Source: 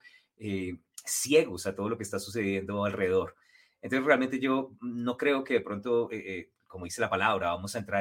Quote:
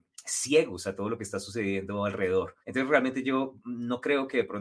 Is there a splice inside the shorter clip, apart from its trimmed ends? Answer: yes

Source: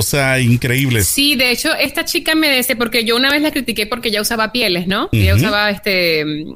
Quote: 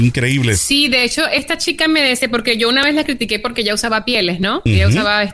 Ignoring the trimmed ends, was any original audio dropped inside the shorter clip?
no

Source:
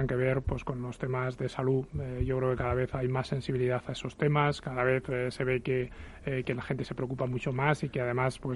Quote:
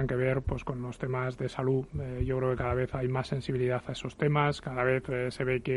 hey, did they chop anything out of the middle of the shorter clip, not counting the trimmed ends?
no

